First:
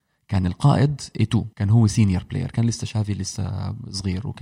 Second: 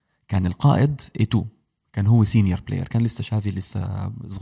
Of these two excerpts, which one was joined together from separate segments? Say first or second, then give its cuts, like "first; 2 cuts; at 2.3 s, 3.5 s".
first; 1 cut; at 1.5 s